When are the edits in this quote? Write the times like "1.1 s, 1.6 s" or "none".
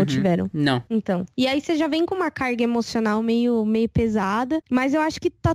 4.6 s